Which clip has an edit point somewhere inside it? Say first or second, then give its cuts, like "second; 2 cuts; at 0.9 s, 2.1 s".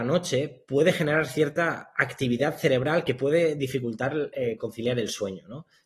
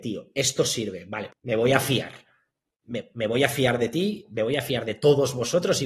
second; 1 cut; at 1.3 s